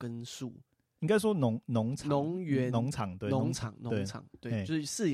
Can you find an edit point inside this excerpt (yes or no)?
no